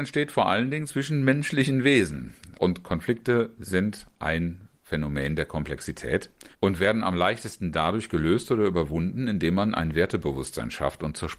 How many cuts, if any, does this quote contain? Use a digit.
2